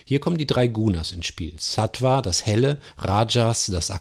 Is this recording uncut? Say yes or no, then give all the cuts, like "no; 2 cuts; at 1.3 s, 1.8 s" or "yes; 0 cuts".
yes; 0 cuts